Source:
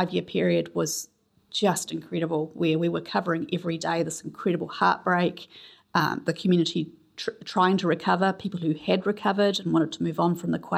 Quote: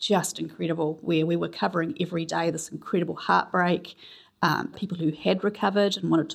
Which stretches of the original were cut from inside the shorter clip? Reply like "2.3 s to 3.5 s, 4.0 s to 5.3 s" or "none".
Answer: 6.2 s to 8.3 s